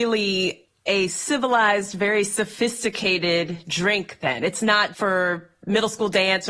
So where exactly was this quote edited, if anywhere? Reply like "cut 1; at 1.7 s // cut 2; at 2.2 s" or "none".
cut 1; at 4.9 s